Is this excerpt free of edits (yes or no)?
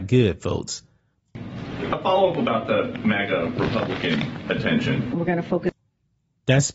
no